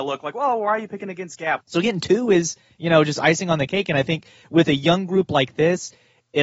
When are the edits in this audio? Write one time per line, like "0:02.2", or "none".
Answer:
0:01.6